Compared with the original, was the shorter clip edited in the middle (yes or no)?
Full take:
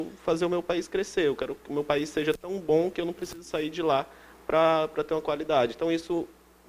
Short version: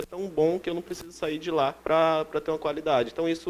yes